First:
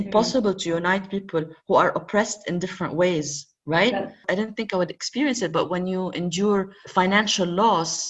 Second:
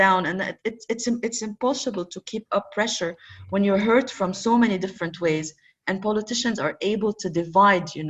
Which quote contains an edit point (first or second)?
first